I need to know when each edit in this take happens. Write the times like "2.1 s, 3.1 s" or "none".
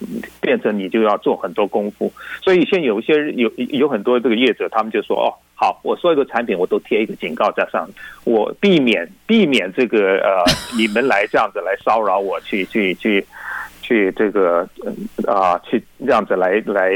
none